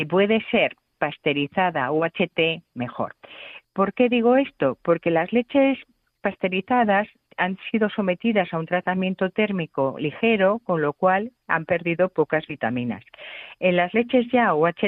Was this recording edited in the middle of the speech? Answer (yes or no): no